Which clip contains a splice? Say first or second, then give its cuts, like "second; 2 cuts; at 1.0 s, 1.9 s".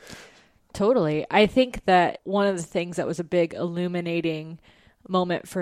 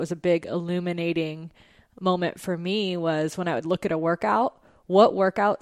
first; 1 cut; at 2.2 s